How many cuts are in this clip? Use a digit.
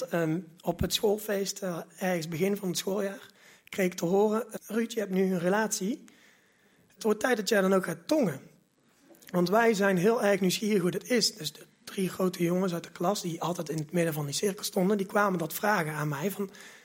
1